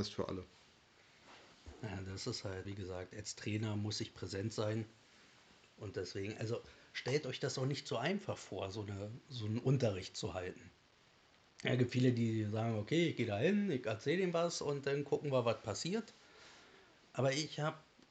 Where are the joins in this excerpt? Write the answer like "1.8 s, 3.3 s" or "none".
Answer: 2.6 s